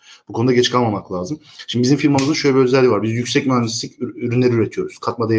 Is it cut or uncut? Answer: uncut